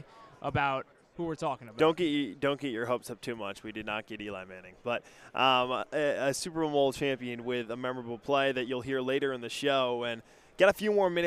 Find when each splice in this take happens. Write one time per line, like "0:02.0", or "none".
none

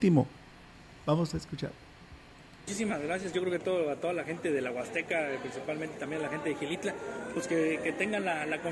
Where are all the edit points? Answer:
none

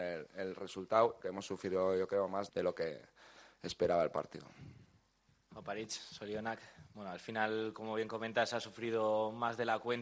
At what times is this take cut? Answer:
0:01.2
0:02.5

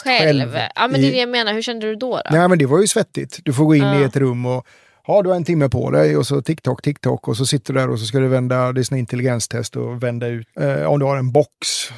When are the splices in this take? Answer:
none

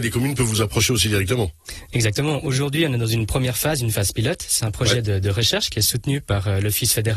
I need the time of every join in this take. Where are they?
none

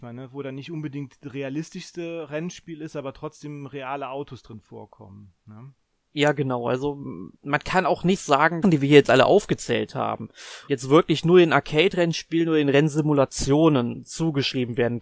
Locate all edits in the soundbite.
0:07.3
0:08.6
0:10.7

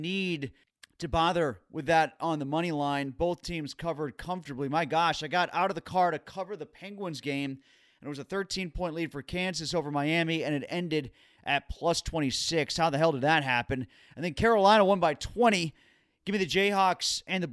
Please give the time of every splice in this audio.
none

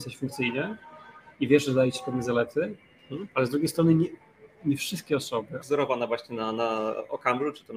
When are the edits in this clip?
0:04.6
0:05.6

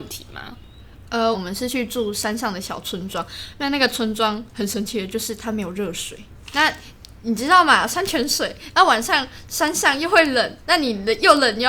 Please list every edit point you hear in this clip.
0:01.3

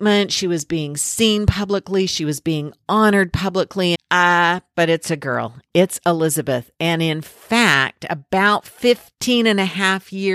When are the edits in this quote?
0:03.9

